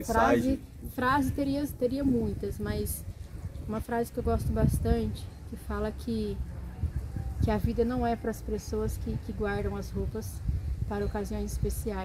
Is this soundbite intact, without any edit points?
yes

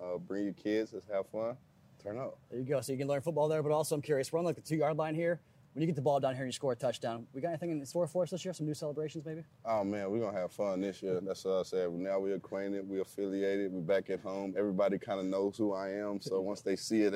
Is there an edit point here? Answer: no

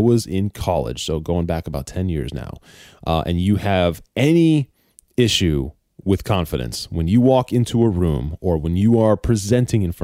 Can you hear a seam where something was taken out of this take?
no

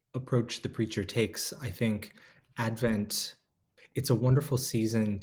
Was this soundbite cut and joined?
no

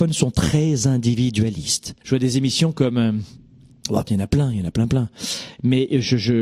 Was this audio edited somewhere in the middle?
yes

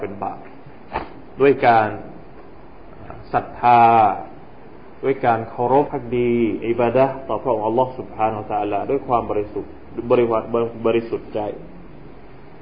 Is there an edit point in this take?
yes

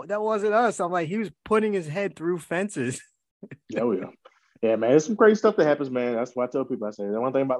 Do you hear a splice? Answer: no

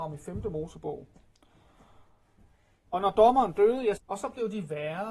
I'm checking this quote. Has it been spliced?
yes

